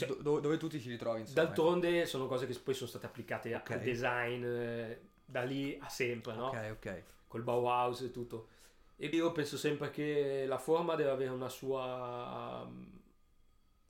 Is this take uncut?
no; 1 cut; at 9.1 s

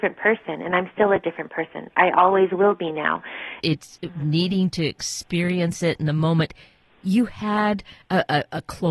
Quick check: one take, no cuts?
no; 1 cut; at 3.6 s

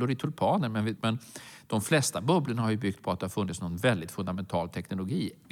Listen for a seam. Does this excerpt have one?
yes; 1 cut; at 1.0 s

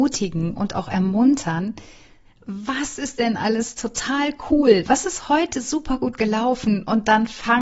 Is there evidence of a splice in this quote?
yes; 1 cut; at 2.2 s

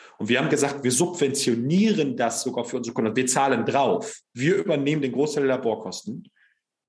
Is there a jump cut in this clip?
no; 0 cuts

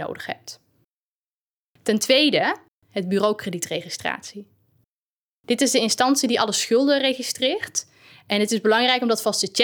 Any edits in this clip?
yes; 1 cut; at 2.8 s

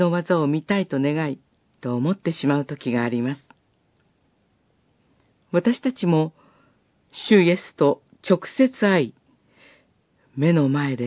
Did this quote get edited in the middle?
yes; 2 cuts; at 1.8 s, 5.4 s

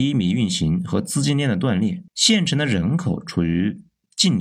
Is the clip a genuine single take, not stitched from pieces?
no; 1 cut; at 2.1 s

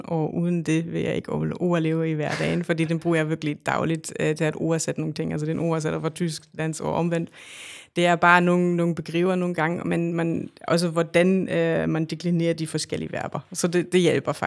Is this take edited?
no; 0 cuts

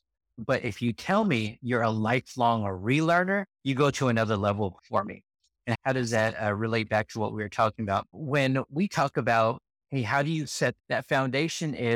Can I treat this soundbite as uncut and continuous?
yes; 0 cuts

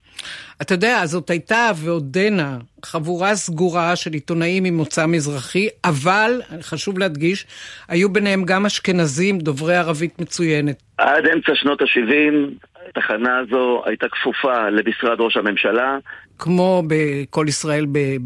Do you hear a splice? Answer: yes; 3 cuts; at 10.8 s, 12.9 s, 16.2 s

